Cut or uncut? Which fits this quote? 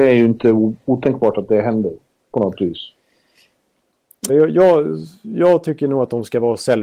cut